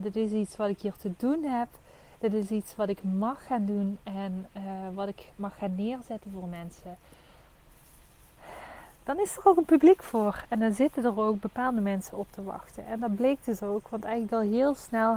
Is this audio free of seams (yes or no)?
yes